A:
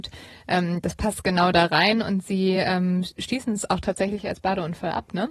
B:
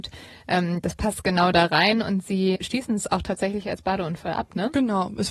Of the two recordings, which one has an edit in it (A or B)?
B